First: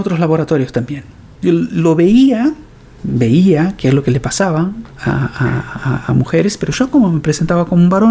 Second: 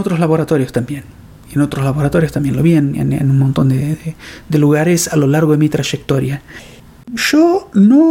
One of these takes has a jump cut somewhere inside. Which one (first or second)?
first